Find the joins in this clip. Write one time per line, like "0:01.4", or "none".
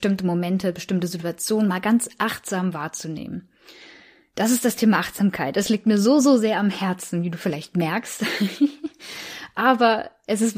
none